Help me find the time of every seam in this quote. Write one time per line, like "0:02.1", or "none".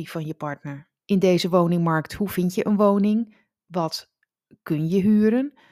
0:01.0